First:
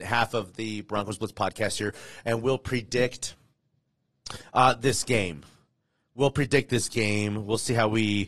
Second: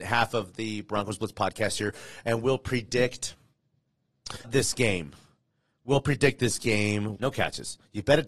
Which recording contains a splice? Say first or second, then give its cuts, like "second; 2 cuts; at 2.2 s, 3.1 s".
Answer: second; 2 cuts; at 4.4 s, 7.1 s